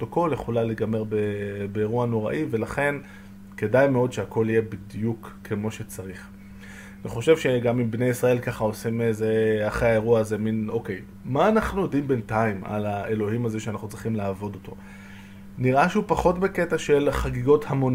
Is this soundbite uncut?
yes; 0 cuts

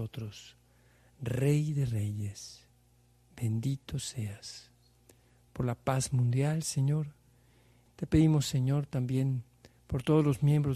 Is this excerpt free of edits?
no; 1 cut; at 7.9 s

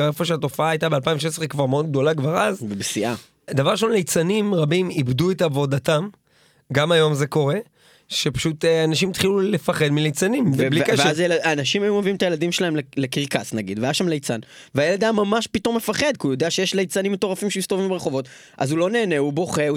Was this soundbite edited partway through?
no; 0 cuts

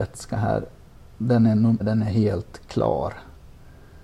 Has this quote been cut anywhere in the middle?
yes; 1 cut; at 1.8 s

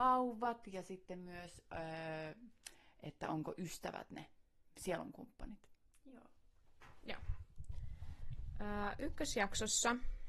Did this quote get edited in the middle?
no; 0 cuts

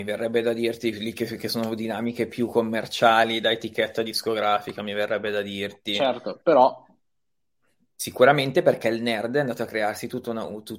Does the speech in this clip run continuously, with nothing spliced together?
yes; 0 cuts

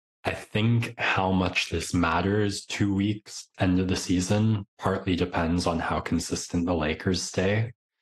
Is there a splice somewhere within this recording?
yes; 1 cut; at 3.5 s

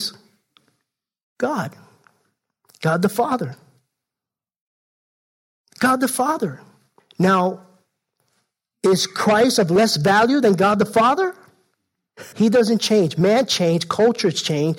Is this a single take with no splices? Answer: no; 1 cut; at 12.3 s

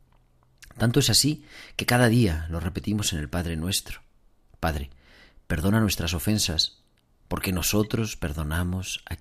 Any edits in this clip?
no; 0 cuts

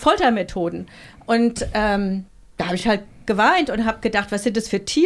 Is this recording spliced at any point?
no; 0 cuts

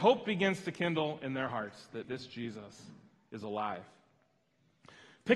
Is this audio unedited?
no; 1 cut; at 2.0 s

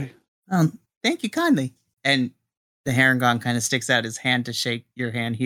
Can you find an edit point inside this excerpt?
no; 0 cuts

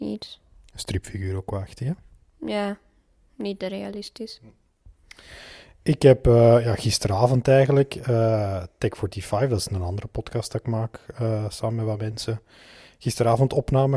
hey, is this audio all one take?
yes; 0 cuts

